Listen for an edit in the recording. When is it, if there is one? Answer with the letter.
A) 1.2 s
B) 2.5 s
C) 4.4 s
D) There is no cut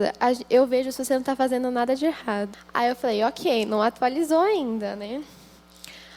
B